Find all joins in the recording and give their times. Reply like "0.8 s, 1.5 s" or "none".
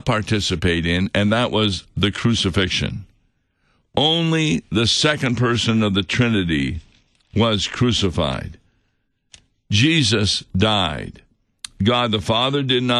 none